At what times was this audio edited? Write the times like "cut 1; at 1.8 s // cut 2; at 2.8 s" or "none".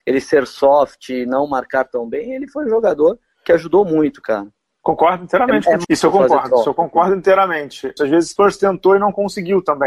cut 1; at 5.8 s // cut 2; at 8.0 s